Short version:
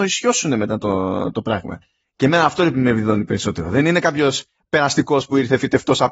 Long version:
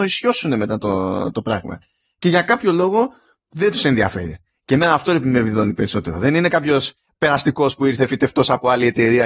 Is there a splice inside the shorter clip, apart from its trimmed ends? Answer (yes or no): yes